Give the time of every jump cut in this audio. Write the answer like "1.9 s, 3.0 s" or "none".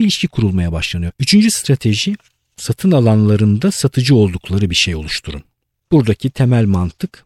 1.1 s